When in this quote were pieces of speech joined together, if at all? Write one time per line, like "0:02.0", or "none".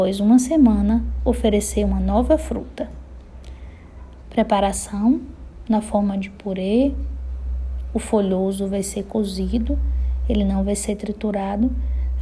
0:04.2